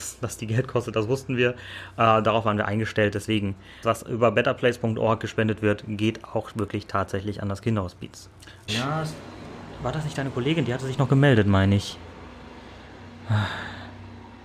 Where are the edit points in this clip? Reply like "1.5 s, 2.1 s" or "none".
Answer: 3.8 s, 8.7 s